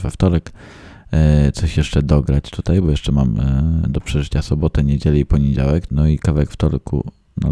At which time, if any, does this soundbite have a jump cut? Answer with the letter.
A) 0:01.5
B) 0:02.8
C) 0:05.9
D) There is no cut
C